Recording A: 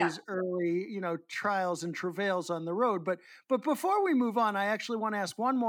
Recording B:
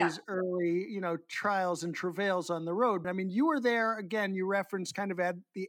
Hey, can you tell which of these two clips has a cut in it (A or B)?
B